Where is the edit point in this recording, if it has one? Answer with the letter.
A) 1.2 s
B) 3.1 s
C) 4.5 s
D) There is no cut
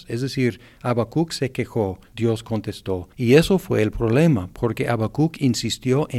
B